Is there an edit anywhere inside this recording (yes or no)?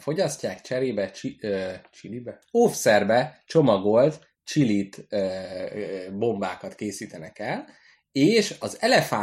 no